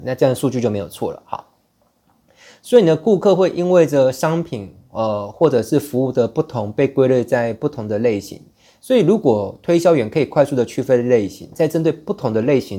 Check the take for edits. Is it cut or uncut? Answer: uncut